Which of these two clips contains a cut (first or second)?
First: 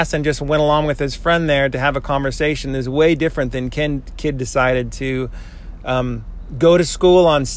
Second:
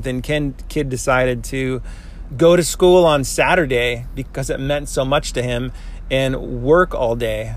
second